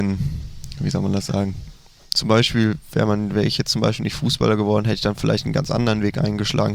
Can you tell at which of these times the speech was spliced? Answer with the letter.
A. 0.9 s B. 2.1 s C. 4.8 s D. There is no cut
B